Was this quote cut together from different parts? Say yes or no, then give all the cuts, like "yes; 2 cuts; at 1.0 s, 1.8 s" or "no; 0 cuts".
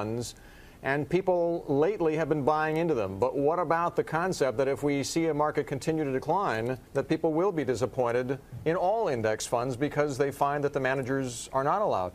yes; 1 cut; at 6.9 s